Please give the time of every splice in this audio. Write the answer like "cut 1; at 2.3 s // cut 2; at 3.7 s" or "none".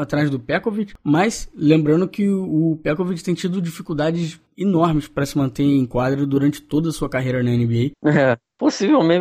cut 1; at 7.9 s